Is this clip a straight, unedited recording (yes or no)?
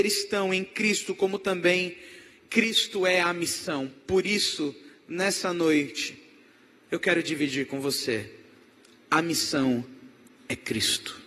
yes